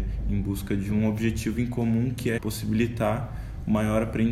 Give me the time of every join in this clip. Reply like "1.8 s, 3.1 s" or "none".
2.4 s